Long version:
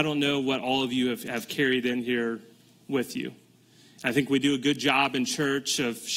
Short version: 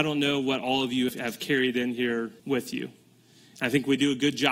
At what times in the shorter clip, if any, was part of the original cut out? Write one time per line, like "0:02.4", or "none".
0:01.1
0:02.4